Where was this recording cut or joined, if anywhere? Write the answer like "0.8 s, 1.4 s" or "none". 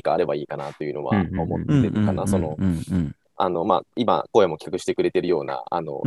none